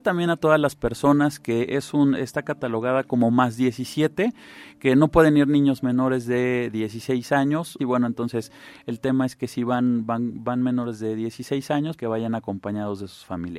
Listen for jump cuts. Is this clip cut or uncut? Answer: cut